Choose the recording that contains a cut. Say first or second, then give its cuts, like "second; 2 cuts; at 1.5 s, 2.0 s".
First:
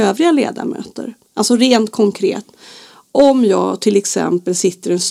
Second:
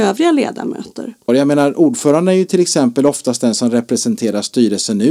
second; 1 cut; at 1.3 s